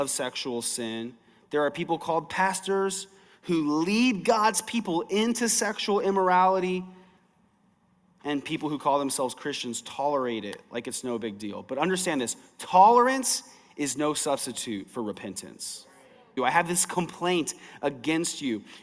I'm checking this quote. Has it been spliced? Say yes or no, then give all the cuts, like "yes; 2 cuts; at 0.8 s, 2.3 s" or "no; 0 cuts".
yes; 1 cut; at 16.4 s